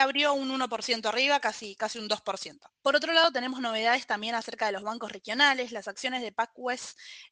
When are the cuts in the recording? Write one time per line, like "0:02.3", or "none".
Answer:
0:02.7